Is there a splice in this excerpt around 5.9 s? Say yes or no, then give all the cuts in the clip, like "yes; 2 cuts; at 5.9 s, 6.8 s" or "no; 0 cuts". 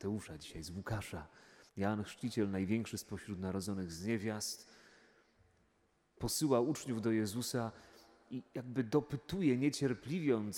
no; 1 cut; at 1.7 s